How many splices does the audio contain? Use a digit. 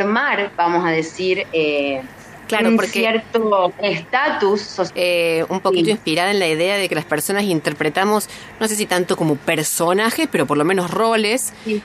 1